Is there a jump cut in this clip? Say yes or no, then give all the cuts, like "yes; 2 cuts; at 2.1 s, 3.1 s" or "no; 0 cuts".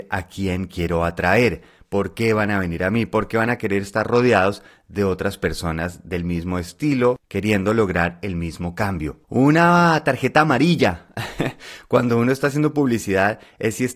yes; 1 cut; at 9.2 s